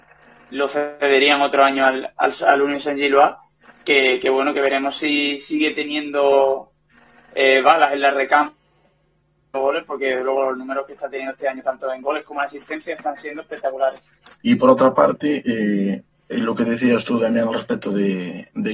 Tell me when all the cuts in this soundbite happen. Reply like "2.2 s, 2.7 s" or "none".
14.3 s